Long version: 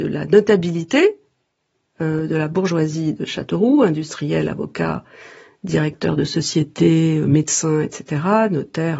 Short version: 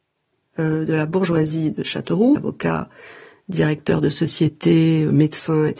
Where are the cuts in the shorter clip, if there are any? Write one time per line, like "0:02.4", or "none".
0:02.3